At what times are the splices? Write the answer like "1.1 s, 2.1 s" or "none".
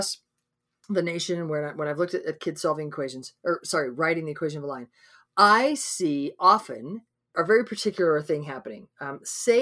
none